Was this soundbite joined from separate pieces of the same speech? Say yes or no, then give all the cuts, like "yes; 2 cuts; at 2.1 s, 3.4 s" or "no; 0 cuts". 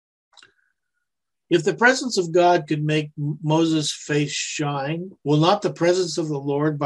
yes; 2 cuts; at 1.3 s, 5.2 s